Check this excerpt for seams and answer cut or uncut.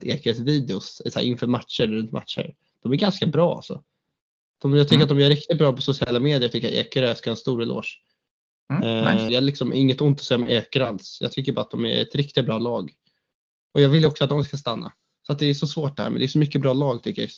cut